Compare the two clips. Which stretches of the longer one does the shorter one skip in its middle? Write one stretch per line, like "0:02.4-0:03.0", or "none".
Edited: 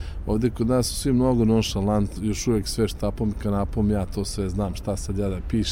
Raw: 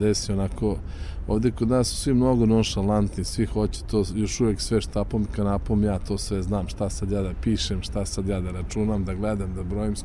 0:03.2-0:04.1